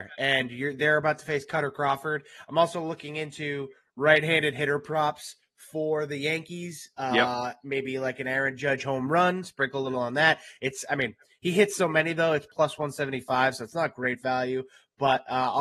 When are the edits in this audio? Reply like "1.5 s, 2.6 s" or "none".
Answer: none